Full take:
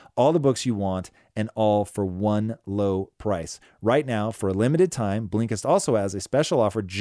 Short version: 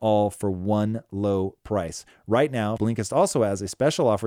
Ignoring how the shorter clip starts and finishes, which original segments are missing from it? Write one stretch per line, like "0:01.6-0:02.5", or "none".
0:04.3-0:05.3